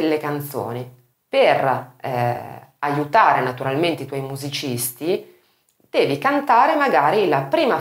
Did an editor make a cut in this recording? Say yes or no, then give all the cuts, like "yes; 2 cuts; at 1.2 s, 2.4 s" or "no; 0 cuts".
yes; 1 cut; at 1.1 s